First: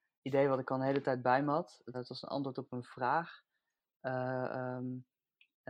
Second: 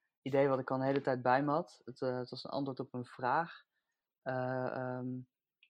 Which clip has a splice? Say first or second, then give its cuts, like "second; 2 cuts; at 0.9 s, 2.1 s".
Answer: first; 1 cut; at 1.9 s